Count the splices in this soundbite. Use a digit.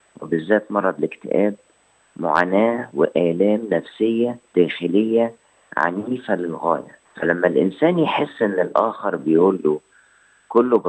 2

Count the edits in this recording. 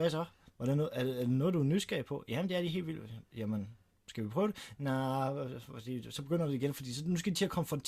0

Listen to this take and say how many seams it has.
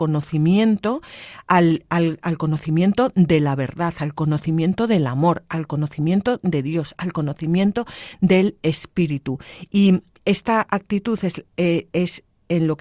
0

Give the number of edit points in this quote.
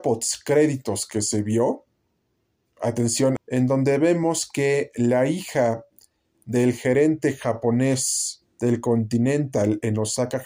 2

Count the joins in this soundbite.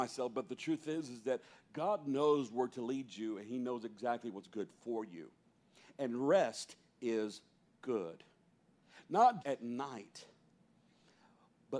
1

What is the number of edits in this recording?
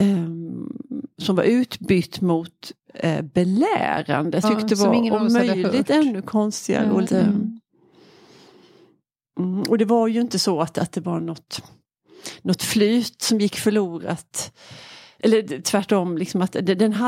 2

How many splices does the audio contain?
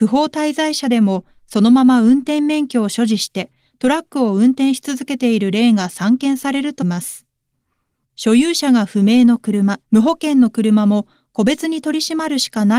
2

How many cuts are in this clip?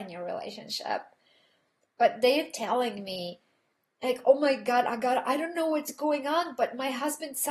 0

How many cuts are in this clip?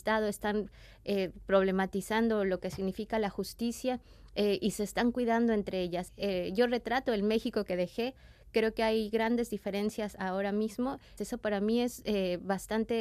2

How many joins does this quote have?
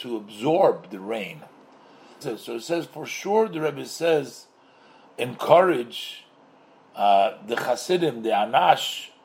2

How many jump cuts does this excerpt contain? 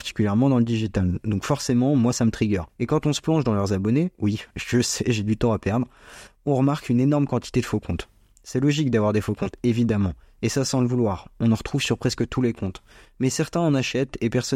1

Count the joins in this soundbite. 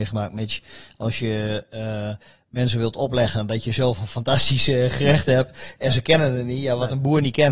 0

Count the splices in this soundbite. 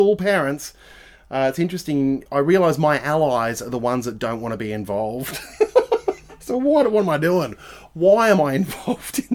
0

